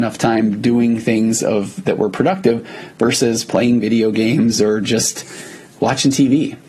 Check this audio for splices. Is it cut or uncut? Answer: uncut